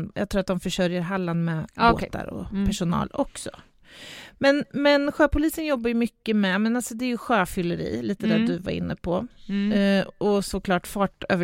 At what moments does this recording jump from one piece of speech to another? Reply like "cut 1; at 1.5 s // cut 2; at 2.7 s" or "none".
none